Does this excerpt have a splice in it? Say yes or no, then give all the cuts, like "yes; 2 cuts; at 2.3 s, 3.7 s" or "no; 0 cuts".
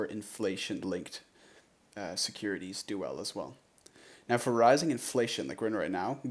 no; 0 cuts